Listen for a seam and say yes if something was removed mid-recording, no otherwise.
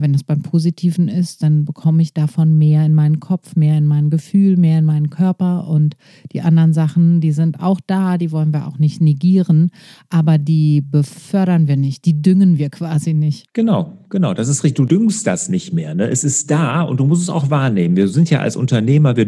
no